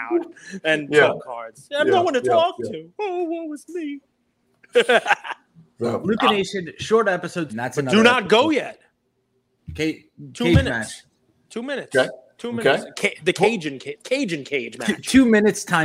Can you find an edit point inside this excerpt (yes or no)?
yes